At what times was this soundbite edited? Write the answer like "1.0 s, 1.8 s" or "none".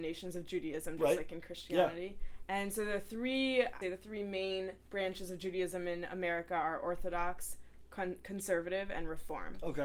3.8 s